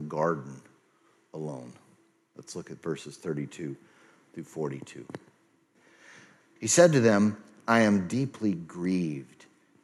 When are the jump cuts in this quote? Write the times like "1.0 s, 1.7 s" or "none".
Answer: 6.6 s